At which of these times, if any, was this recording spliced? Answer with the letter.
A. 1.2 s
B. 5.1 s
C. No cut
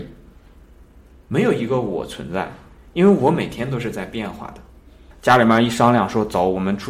B